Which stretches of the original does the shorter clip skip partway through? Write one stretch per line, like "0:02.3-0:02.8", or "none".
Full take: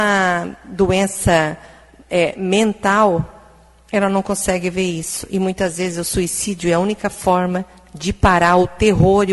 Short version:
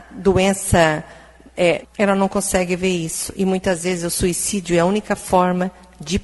0:02.3-0:03.8

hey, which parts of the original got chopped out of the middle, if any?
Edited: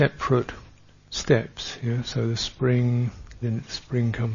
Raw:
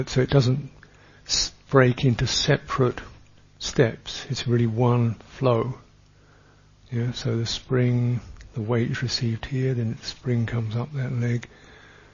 0:04.3-0:06.9
0:08.5-0:09.7

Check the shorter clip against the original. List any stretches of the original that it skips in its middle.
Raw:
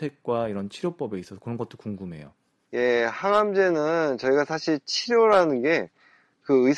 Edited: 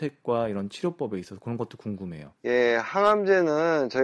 0:02.4-0:02.7

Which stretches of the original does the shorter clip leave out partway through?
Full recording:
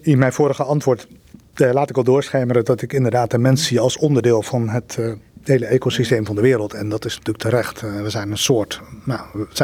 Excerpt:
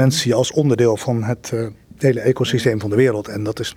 none

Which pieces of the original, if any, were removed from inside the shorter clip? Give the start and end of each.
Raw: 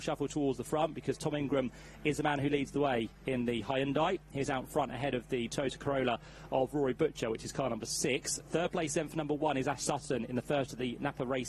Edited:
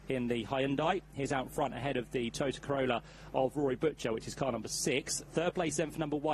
none

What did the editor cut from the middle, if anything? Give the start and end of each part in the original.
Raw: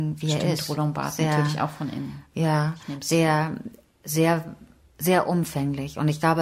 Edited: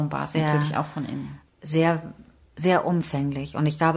0:02.3-0:03.9

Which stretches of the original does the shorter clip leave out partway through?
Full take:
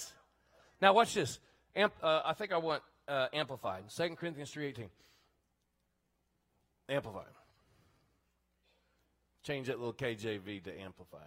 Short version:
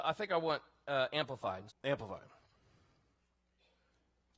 0:03.9-0:06.7

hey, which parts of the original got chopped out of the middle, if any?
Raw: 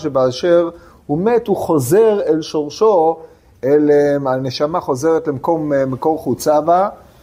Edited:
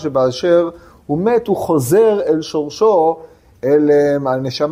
none

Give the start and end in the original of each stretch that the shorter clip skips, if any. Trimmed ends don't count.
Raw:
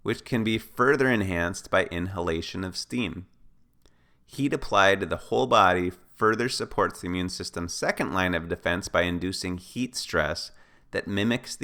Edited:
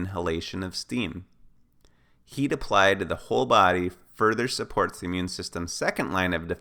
none

